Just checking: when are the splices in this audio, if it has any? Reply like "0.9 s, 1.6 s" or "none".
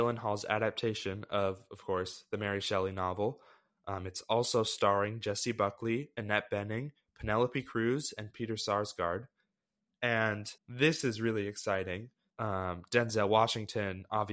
10.6 s, 12.3 s